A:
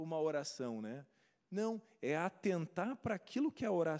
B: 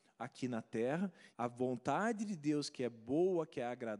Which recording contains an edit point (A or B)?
B